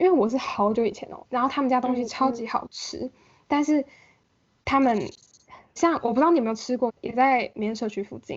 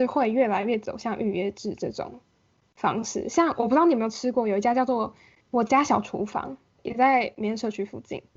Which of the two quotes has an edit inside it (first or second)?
first